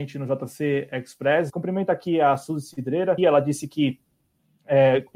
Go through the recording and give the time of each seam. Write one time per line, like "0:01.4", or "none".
0:01.5
0:03.2

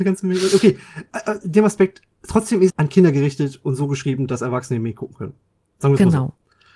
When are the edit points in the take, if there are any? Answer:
0:02.7

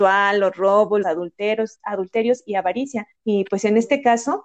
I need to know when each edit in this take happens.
0:01.0
0:03.1

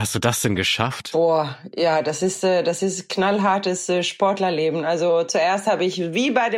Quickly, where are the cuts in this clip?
0:01.1

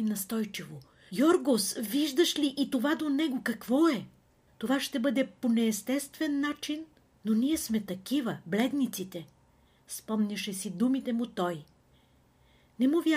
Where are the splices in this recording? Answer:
0:01.1
0:04.5

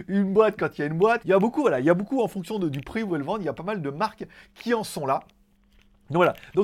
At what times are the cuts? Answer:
0:01.2

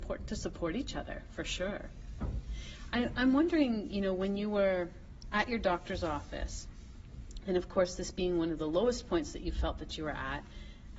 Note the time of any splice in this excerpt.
none

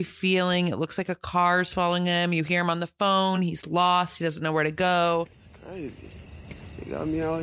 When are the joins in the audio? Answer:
none

